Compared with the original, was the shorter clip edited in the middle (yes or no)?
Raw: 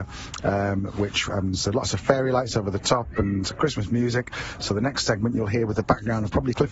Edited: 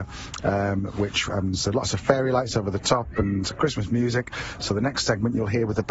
no